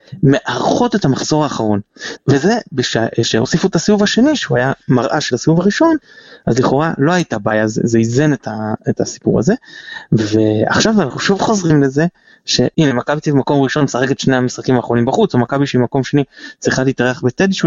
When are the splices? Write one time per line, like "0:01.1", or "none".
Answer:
0:02.2